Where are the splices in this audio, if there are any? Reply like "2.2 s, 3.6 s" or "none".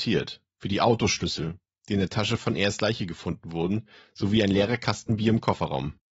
none